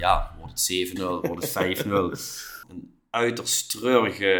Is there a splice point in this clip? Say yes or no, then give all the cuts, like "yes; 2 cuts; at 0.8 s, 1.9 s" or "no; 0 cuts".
yes; 2 cuts; at 1.0 s, 2.6 s